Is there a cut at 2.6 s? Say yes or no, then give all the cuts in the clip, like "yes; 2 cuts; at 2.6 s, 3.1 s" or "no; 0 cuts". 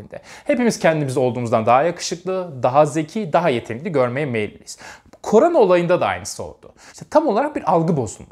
no; 1 cut; at 6.9 s